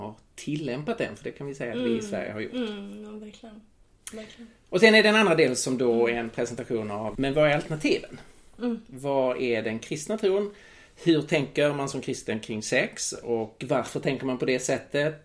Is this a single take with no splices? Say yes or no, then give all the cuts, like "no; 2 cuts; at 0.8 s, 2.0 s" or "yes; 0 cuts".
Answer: no; 1 cut; at 7.2 s